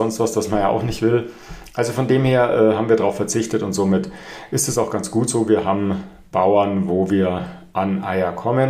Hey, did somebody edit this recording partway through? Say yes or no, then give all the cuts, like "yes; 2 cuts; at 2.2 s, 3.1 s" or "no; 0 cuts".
no; 0 cuts